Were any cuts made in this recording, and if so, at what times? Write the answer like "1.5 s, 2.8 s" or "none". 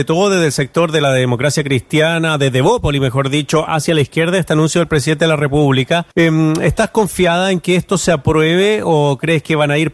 3.7 s, 6.1 s